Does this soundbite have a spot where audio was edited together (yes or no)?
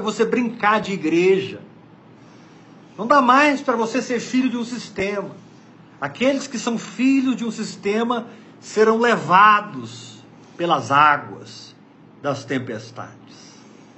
no